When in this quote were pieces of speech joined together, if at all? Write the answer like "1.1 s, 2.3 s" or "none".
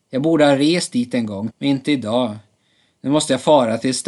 1.5 s